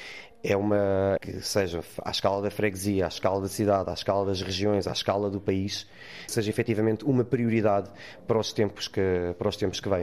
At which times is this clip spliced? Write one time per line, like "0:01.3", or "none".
0:01.2
0:06.3